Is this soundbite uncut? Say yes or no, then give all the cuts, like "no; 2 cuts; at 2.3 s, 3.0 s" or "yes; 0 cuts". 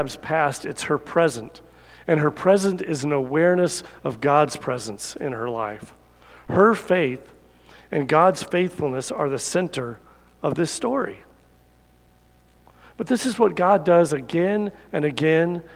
yes; 0 cuts